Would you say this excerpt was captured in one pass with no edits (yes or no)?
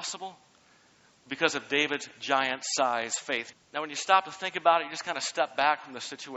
no